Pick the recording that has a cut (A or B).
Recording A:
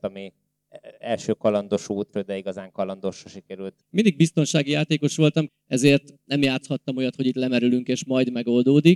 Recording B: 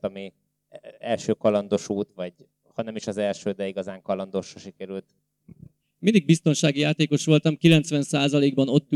A